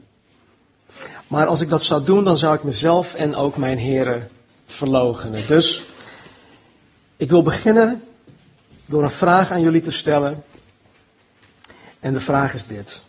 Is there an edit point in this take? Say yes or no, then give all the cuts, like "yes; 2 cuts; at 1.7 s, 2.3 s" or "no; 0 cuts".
no; 0 cuts